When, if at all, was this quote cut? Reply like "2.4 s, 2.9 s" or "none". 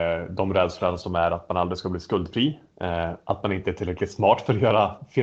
none